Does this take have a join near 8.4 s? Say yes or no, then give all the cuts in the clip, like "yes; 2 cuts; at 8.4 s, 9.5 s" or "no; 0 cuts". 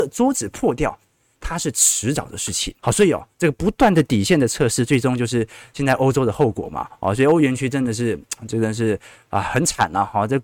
no; 2 cuts; at 1.3 s, 2.8 s